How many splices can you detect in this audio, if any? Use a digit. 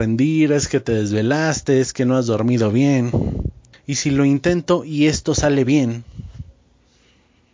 1